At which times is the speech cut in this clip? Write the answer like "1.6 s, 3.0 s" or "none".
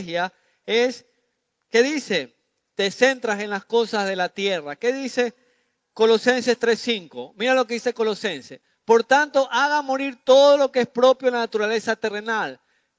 none